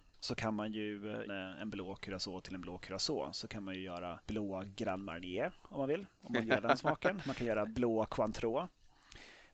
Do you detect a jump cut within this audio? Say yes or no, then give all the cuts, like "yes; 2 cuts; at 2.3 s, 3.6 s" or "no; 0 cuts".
yes; 1 cut; at 1.3 s